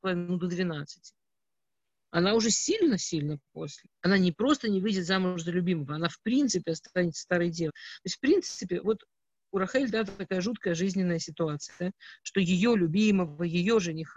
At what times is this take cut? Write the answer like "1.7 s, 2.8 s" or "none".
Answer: 3.8 s, 7.7 s